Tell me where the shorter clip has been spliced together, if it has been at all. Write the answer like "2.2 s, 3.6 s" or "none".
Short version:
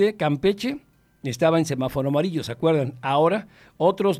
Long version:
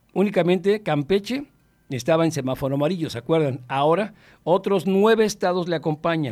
none